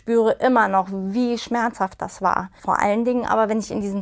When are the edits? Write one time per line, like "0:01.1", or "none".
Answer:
none